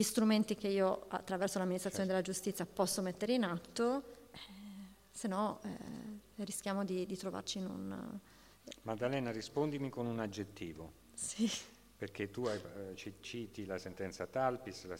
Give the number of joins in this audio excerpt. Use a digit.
0